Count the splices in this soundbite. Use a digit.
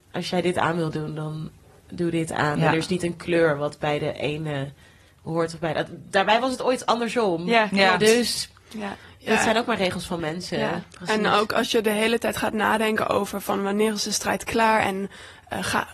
0